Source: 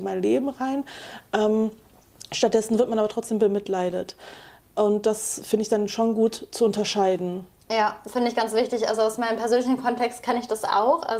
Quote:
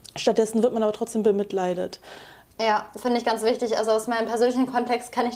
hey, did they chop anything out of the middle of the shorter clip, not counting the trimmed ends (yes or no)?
yes